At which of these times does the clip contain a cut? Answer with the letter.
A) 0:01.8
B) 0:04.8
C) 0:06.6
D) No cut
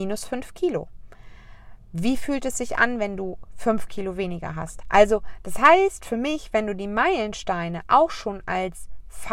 B